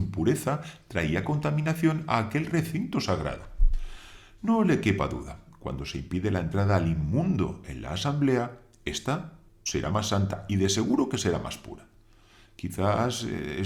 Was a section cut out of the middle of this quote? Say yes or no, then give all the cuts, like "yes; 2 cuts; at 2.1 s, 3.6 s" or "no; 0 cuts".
no; 0 cuts